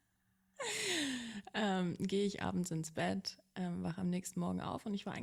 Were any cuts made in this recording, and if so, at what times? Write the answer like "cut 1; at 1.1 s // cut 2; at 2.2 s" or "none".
none